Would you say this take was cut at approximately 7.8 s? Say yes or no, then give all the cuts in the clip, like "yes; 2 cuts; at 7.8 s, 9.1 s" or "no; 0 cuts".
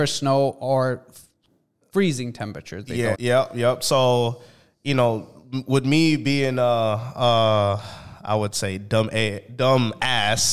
no; 1 cut; at 3.1 s